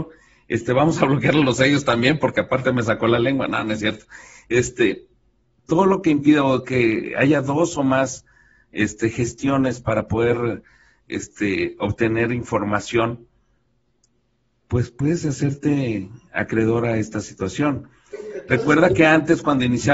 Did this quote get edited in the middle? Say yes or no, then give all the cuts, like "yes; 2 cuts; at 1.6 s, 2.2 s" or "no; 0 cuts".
no; 0 cuts